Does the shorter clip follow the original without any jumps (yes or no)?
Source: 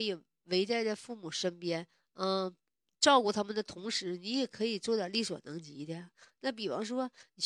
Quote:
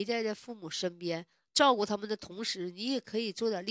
no